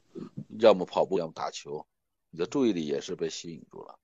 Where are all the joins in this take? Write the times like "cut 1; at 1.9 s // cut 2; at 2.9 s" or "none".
cut 1; at 1.1 s